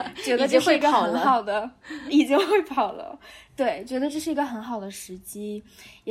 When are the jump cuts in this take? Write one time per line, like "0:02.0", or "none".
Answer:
none